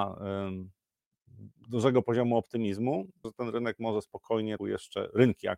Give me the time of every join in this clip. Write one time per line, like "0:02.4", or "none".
0:03.2
0:04.6